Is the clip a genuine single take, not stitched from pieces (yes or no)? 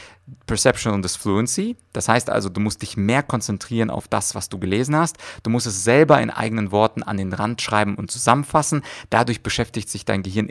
yes